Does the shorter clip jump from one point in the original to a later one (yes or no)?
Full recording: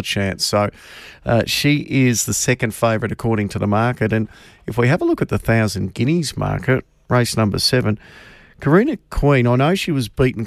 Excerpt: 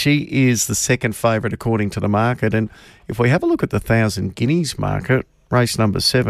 no